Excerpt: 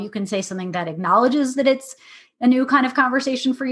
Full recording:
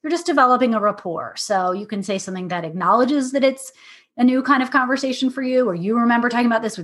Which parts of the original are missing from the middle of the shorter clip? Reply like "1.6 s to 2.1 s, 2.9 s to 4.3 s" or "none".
none